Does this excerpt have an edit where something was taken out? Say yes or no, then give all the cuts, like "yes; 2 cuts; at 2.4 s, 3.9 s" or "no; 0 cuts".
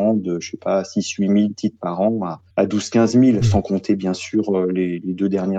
yes; 1 cut; at 2.5 s